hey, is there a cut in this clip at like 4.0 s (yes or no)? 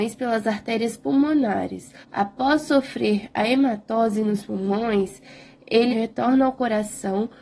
no